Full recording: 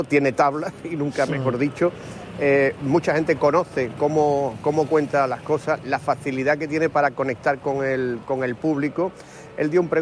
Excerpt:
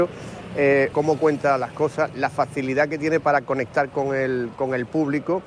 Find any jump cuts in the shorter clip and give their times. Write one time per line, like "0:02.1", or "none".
0:00.9